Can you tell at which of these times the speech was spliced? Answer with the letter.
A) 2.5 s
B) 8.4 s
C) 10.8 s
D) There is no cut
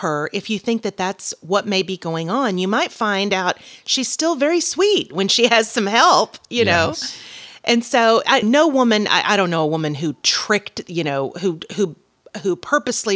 B